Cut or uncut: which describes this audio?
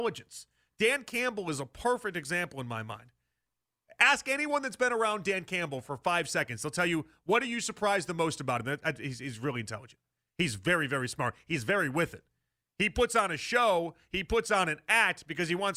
uncut